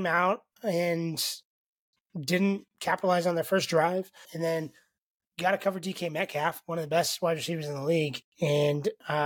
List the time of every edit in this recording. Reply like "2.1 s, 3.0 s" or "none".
4.3 s